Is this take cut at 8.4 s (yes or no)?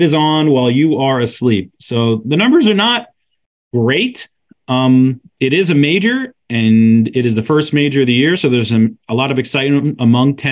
no